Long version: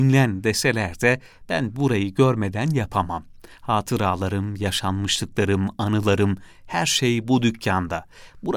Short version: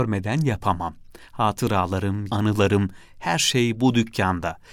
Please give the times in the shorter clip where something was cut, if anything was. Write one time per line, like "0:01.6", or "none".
0:02.3

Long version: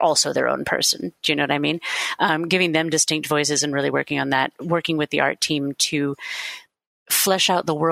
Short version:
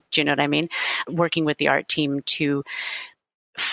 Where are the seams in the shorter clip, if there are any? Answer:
0:01.0

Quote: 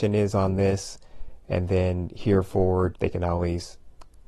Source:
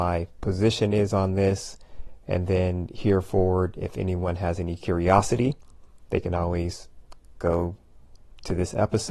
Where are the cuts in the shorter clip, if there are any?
0:03.0

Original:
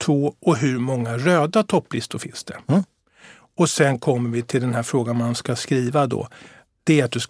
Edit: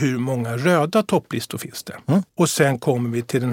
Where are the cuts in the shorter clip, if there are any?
0:02.3

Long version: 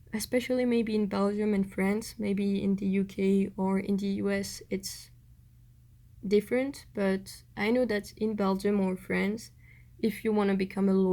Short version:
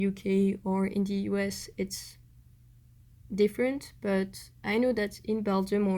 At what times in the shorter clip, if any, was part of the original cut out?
none

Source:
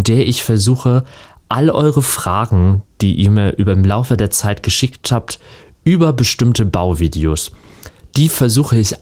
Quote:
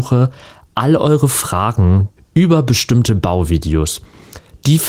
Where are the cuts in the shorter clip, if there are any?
0:02.2

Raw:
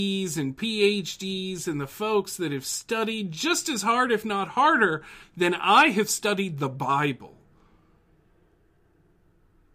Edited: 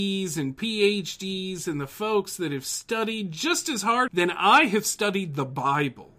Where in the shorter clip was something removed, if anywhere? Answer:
0:04.1

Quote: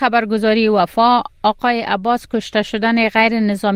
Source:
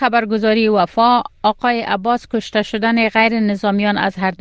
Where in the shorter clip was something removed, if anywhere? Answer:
none

